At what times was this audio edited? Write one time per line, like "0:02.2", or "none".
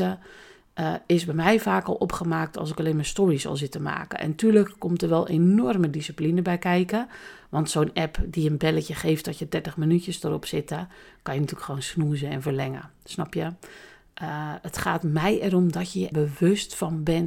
0:16.1